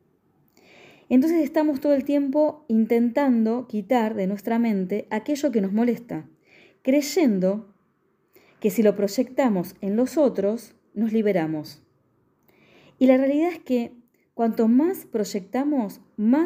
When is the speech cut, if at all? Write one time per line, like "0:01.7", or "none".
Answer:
none